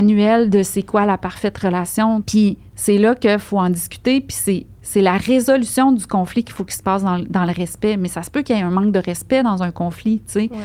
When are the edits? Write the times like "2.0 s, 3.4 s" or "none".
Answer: 2.2 s